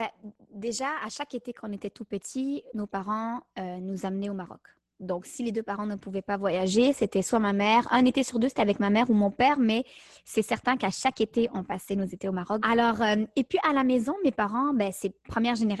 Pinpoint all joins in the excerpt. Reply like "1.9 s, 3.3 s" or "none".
12.6 s